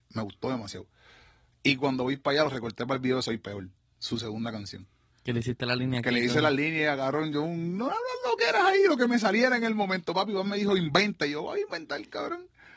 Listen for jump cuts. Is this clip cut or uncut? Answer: uncut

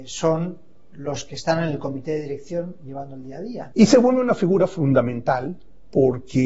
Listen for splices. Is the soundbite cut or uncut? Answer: cut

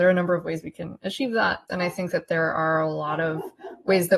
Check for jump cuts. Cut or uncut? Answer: cut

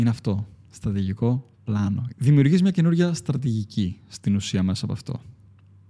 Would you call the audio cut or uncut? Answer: cut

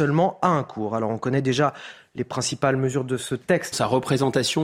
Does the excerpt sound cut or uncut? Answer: cut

